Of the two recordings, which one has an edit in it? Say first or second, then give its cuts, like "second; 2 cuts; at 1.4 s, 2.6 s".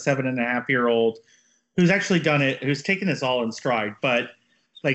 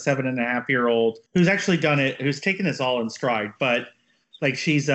second; 1 cut; at 1.3 s